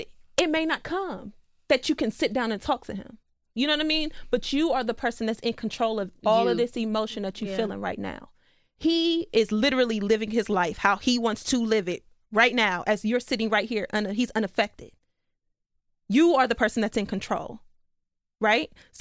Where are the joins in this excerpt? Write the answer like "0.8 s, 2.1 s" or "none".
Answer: none